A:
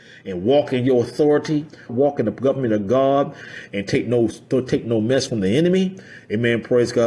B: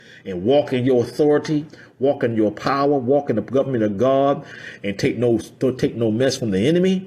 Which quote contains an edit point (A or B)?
A